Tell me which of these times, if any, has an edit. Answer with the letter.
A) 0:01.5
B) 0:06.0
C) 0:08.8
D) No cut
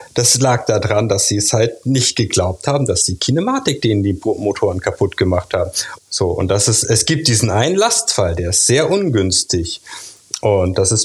B